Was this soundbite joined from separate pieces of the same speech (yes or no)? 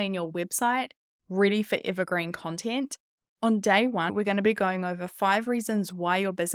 yes